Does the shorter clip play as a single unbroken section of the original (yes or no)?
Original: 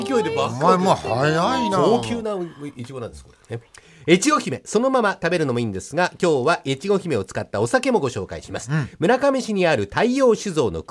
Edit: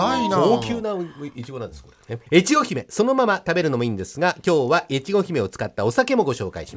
no